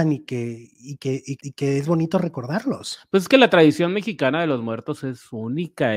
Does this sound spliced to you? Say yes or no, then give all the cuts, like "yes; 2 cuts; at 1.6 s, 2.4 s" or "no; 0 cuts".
yes; 1 cut; at 1.4 s